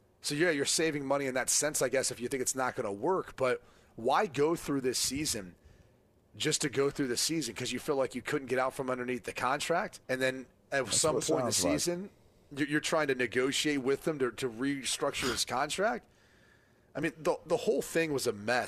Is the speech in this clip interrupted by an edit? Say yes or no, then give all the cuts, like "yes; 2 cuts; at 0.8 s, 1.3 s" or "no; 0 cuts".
yes; 1 cut; at 10.0 s